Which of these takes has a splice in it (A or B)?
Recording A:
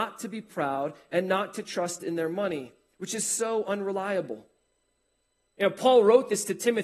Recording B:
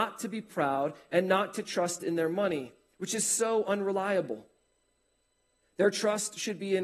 A